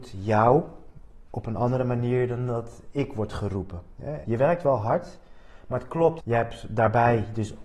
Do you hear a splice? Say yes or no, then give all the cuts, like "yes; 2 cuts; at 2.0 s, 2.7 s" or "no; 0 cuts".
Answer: yes; 2 cuts; at 4.2 s, 6.2 s